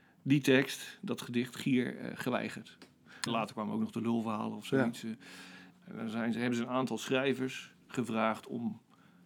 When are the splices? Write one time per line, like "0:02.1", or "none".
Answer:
0:03.3
0:05.7